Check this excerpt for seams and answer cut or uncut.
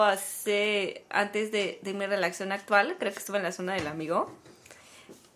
uncut